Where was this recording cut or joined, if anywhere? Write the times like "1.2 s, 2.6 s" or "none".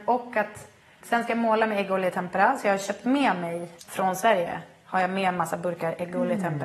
1.0 s, 3.8 s